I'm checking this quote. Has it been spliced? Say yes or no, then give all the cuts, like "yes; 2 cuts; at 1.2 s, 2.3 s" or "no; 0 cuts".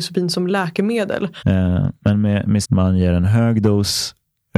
yes; 2 cuts; at 1.4 s, 2.6 s